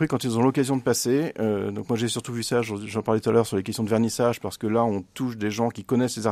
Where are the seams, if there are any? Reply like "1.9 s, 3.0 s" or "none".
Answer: none

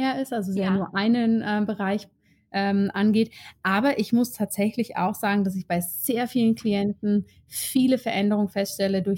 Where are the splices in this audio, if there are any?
none

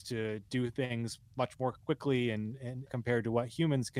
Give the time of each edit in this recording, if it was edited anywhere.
2.9 s

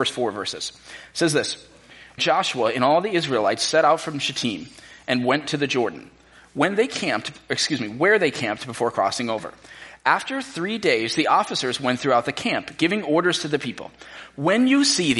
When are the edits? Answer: 2.2 s

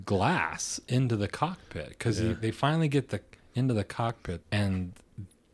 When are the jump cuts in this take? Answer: 4.4 s

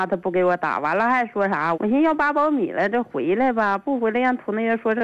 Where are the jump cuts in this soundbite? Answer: 1.7 s

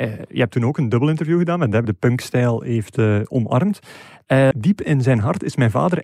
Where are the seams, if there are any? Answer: 1.8 s, 4.5 s

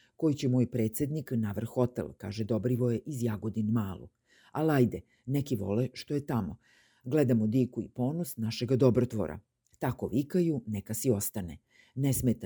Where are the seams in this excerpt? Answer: none

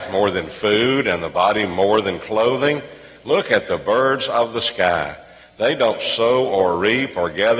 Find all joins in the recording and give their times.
none

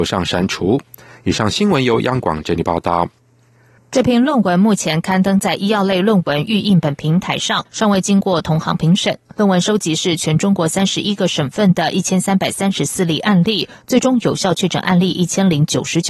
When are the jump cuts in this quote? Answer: 3.8 s

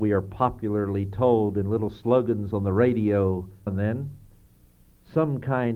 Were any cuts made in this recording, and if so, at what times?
3.7 s

